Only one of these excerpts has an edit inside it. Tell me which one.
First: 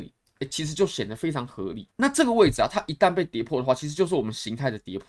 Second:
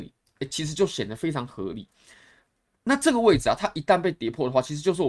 first; 1 cut; at 1.9 s

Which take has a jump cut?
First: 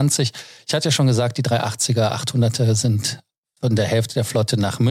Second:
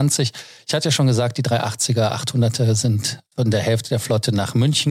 second; 1 cut; at 3.3 s

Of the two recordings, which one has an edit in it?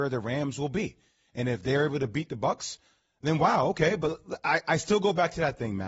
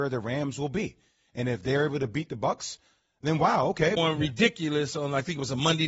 second; 1 cut; at 4.0 s

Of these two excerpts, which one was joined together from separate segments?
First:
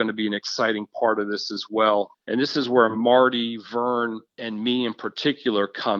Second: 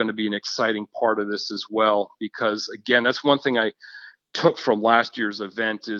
first; 2 cuts; at 2.1 s, 4.3 s

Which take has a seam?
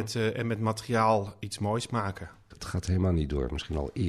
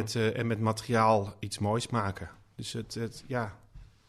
first; 1 cut; at 2.5 s

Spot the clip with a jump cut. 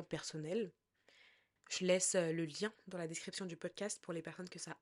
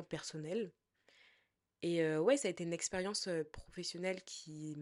first; 1 cut; at 1.6 s

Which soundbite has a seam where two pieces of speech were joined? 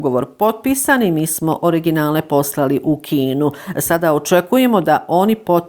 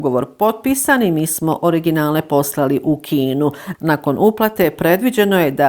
second; 1 cut; at 3.7 s

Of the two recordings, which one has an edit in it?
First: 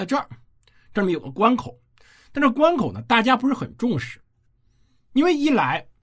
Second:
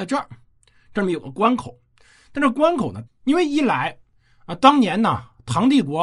second; 1 cut; at 3.1 s

